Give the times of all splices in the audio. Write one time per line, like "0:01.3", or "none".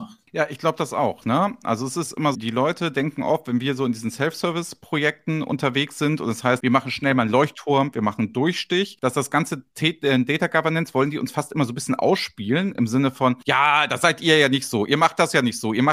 0:02.3